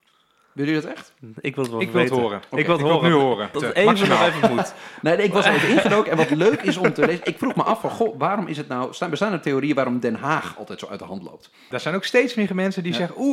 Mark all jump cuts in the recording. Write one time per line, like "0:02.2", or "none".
0:03.5
0:11.7